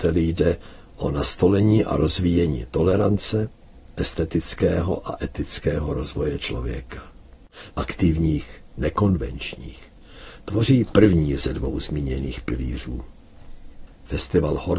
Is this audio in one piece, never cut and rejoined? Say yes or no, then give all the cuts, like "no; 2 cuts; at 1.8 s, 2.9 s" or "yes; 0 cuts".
no; 2 cuts; at 7.7 s, 13.9 s